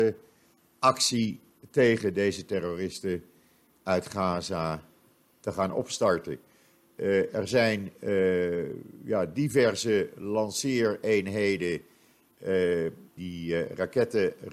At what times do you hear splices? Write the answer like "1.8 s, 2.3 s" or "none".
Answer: 13.2 s